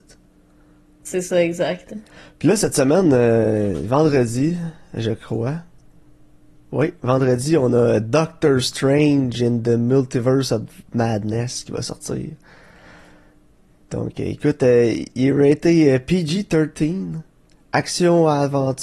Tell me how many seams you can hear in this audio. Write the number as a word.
zero